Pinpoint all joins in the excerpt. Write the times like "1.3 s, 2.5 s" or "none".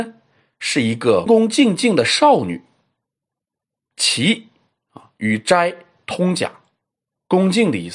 1.3 s